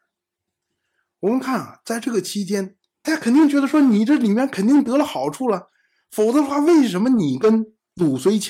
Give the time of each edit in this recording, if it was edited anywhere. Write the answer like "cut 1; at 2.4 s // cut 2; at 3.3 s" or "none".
cut 1; at 3.0 s